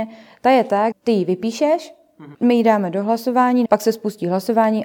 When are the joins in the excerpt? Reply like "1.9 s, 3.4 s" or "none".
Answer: 0.9 s, 2.3 s, 3.7 s